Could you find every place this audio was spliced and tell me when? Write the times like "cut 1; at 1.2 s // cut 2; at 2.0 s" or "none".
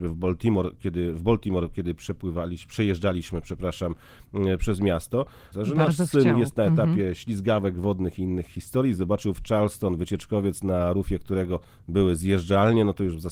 cut 1; at 5.5 s